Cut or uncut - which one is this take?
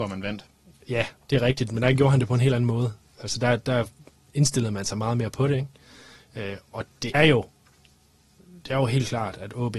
cut